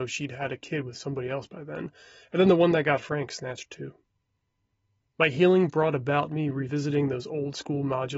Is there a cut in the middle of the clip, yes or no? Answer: no